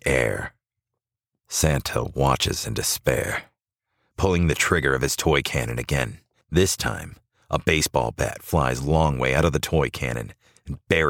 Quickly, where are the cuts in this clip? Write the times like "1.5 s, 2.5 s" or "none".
4.1 s